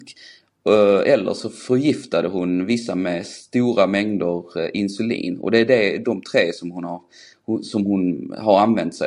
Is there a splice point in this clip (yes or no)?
no